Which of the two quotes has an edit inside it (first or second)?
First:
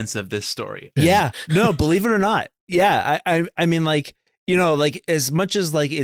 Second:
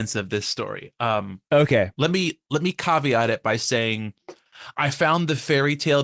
first